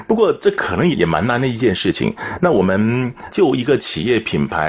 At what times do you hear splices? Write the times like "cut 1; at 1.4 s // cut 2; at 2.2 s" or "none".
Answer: cut 1; at 0.9 s